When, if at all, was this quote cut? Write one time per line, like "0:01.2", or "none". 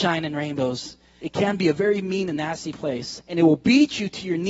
0:01.2